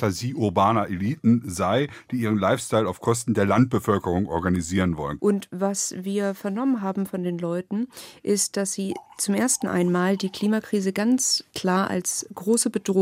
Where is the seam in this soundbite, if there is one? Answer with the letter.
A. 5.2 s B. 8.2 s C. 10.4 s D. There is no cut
A